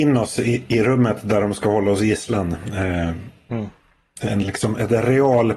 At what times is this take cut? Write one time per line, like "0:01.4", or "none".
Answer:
0:04.2